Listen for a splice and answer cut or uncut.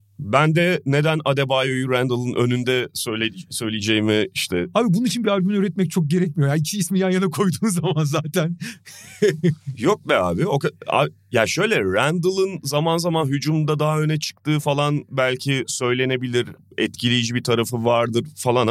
uncut